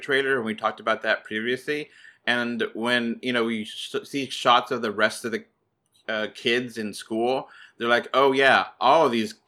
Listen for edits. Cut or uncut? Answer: uncut